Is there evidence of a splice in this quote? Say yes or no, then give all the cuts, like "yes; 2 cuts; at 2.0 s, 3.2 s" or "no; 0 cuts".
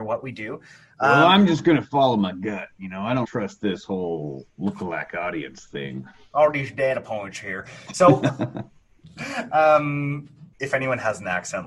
yes; 1 cut; at 3.2 s